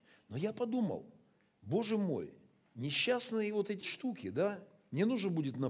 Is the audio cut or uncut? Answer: cut